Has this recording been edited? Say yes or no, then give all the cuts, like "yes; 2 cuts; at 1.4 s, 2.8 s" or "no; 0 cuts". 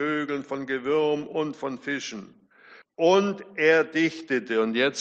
yes; 1 cut; at 2.8 s